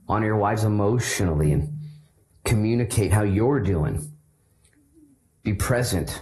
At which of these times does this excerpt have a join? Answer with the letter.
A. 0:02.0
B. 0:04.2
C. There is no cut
C